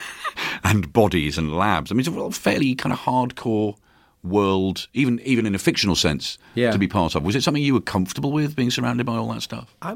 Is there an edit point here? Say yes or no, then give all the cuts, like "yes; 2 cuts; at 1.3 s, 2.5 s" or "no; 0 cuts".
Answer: no; 0 cuts